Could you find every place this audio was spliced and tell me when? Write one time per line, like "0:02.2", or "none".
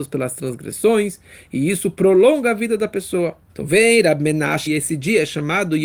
0:03.5
0:04.7